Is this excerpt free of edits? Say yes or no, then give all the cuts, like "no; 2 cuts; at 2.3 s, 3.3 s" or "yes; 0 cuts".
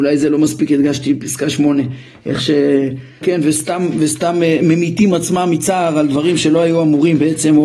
no; 1 cut; at 3.2 s